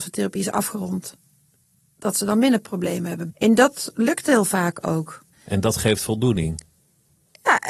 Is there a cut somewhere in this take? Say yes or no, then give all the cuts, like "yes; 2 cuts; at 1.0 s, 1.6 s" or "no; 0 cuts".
yes; 2 cuts; at 3.3 s, 5.3 s